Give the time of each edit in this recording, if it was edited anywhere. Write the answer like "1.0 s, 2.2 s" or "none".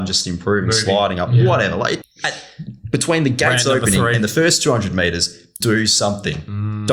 2.0 s, 5.6 s